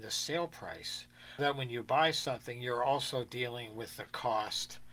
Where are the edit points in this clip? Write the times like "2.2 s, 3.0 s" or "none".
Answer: 1.4 s